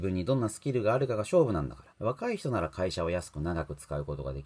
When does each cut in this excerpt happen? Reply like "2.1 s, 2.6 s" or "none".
1.9 s